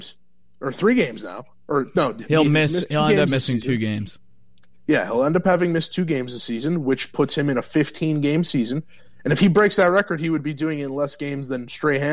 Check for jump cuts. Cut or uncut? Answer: cut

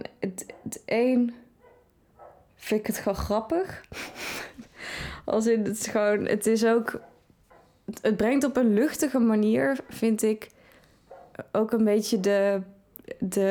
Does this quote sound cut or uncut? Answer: uncut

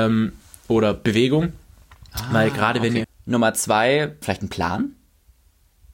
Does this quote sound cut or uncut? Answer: cut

